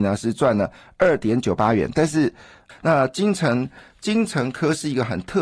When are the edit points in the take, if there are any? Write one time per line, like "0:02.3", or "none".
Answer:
0:02.7